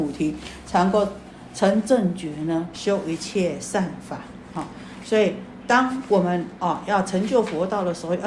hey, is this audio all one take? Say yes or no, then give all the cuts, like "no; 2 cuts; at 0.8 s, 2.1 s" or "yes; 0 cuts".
no; 1 cut; at 2.7 s